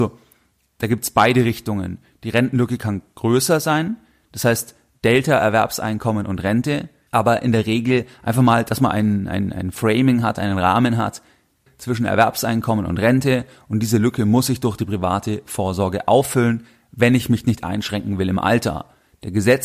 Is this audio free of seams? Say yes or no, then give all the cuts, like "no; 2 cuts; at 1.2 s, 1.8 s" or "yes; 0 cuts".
no; 2 cuts; at 7.1 s, 11.7 s